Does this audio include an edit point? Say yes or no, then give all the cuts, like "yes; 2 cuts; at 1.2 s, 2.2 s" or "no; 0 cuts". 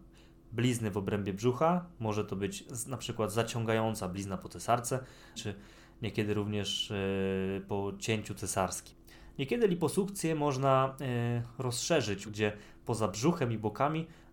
yes; 2 cuts; at 5.4 s, 12.3 s